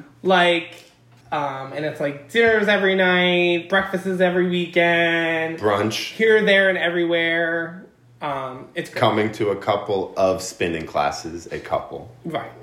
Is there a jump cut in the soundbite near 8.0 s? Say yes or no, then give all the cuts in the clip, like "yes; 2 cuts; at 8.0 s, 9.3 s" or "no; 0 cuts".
no; 1 cut; at 1.2 s